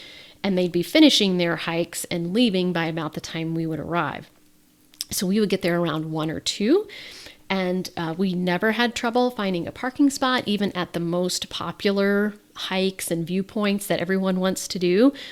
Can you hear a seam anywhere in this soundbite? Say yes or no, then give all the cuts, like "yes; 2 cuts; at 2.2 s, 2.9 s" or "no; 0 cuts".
no; 0 cuts